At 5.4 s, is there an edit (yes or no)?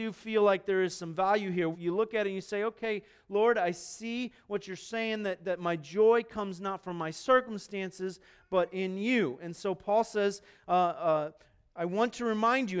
no